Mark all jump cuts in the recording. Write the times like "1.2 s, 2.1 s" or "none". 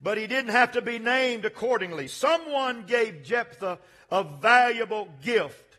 none